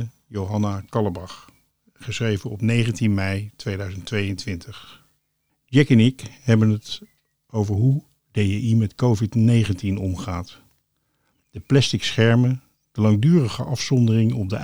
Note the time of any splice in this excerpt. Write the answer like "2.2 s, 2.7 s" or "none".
5.5 s